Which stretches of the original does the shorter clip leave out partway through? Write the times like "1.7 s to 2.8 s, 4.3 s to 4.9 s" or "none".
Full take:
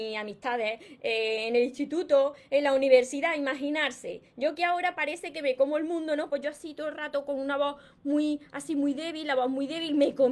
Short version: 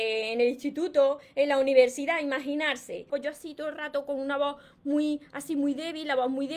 4.2 s to 6.3 s